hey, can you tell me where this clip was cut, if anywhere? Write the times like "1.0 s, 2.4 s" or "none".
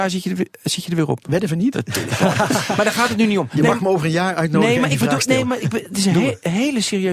none